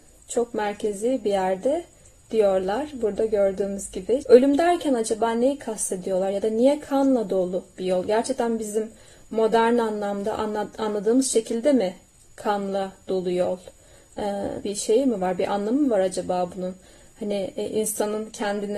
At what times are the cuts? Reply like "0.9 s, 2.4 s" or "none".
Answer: 4.2 s, 14.6 s